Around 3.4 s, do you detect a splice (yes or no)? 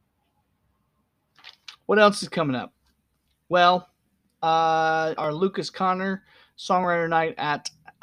no